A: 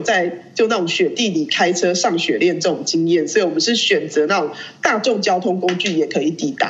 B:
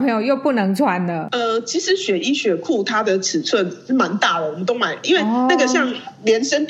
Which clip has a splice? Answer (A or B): B